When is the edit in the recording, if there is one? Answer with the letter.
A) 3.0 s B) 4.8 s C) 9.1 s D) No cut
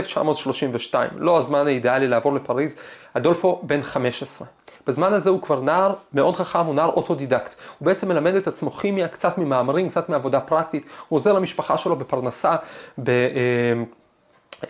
A